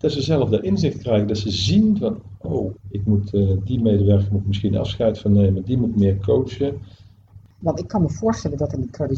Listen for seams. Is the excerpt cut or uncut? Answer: cut